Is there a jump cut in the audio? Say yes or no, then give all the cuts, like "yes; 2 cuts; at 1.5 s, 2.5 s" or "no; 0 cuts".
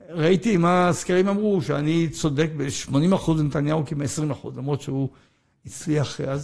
no; 0 cuts